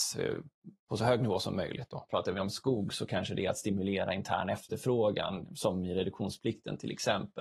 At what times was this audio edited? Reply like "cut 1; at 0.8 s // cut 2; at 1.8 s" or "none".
cut 1; at 2.1 s